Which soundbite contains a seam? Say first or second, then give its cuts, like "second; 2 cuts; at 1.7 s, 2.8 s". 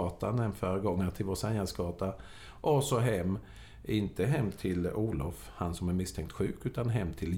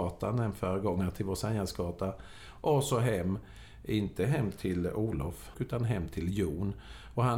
second; 1 cut; at 5.5 s